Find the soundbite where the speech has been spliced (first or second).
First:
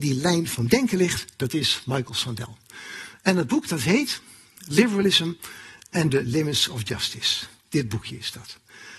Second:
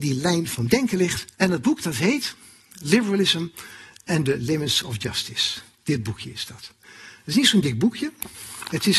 second